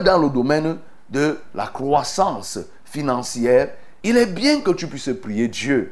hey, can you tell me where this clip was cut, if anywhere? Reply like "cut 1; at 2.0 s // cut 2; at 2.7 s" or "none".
cut 1; at 4.0 s